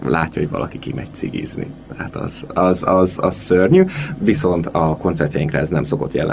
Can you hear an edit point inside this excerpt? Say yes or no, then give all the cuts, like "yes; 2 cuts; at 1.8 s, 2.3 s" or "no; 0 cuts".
yes; 1 cut; at 2.5 s